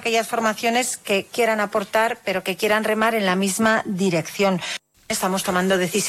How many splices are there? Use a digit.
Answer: 1